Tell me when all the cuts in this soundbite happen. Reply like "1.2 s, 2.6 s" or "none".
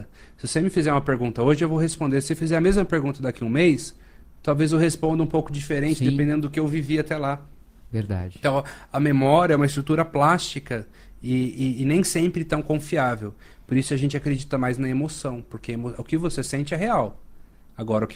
none